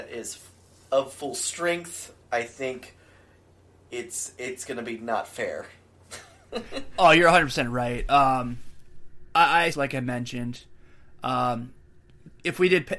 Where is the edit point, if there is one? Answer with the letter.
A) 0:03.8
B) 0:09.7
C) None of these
B